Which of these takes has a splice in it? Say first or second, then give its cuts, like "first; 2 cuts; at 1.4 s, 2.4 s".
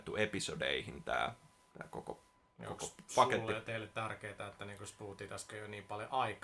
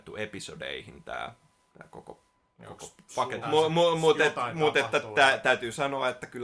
second; 1 cut; at 3.4 s